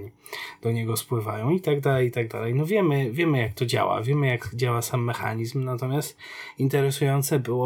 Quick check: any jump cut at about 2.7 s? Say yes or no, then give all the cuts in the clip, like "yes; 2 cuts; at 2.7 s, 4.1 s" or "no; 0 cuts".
no; 0 cuts